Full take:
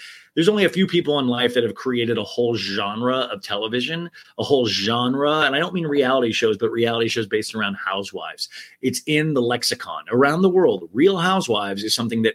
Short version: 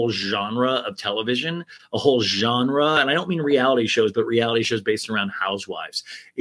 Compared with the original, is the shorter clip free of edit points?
yes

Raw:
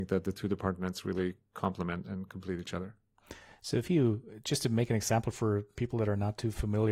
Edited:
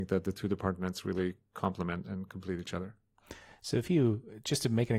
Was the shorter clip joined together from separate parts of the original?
no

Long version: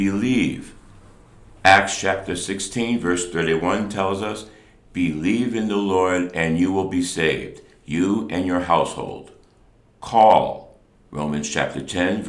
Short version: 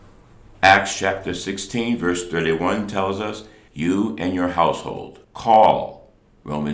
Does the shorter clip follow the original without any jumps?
no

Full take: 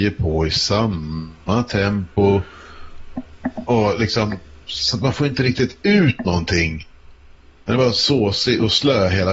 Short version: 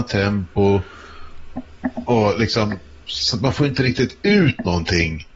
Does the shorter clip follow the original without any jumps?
yes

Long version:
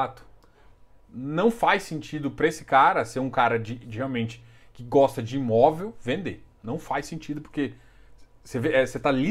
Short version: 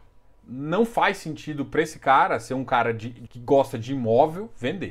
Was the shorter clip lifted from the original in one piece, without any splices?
no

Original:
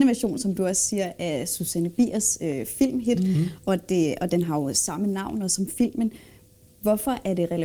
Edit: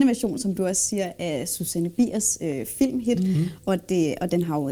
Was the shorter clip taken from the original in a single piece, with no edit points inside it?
yes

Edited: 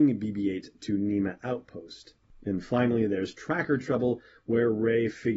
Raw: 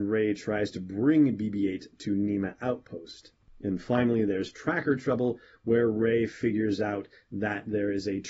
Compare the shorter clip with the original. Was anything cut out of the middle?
no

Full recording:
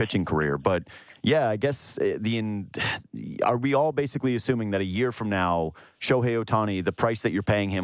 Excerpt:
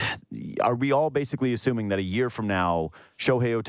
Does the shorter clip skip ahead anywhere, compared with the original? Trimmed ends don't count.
no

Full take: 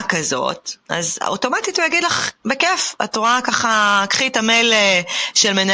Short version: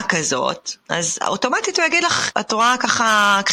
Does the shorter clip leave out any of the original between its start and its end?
yes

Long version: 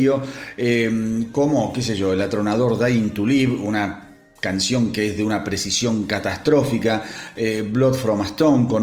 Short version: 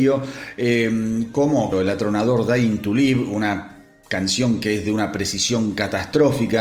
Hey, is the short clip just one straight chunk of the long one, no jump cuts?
no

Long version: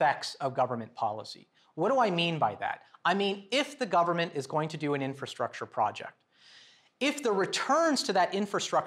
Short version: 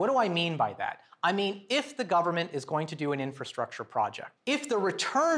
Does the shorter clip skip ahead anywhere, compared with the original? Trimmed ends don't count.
yes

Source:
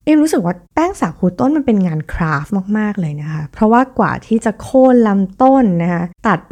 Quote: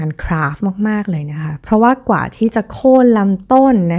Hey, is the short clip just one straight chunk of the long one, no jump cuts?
yes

